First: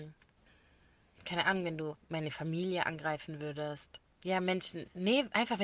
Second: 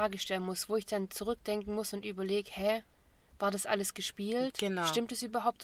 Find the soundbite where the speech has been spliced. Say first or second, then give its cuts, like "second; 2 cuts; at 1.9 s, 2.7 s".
first; 2 cuts; at 2.0 s, 4.0 s